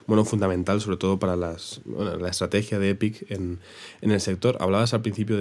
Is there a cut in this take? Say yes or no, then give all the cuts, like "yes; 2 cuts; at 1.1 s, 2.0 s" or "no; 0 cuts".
no; 0 cuts